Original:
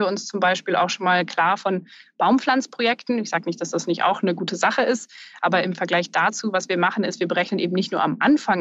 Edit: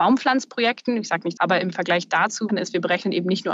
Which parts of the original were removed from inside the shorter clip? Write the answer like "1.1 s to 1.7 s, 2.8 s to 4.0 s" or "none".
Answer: 3.6 s to 5.4 s, 6.5 s to 7.0 s